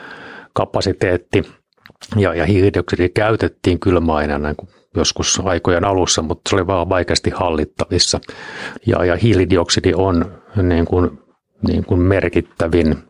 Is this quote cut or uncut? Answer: cut